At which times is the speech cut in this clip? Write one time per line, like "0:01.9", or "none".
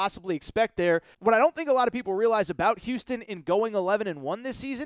0:01.1